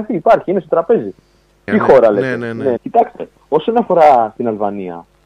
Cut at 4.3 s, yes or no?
no